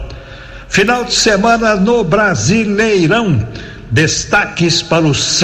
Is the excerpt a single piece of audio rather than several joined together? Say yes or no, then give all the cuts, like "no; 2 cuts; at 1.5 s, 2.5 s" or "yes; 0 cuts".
yes; 0 cuts